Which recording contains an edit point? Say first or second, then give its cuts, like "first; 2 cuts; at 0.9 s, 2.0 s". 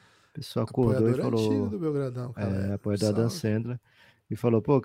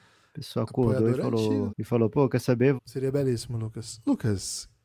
second; 2 cuts; at 1.7 s, 2.8 s